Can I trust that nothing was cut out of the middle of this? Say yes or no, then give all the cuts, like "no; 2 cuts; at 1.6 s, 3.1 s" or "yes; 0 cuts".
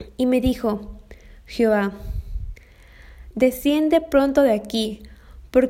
no; 1 cut; at 3.3 s